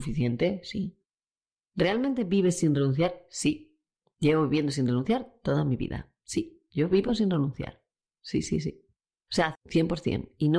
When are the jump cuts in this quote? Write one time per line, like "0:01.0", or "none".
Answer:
0:09.6